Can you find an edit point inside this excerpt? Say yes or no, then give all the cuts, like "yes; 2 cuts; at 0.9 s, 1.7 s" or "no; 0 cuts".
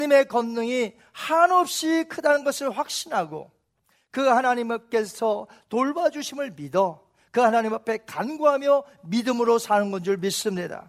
no; 0 cuts